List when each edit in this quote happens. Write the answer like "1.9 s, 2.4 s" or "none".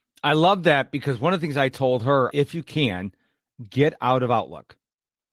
2.3 s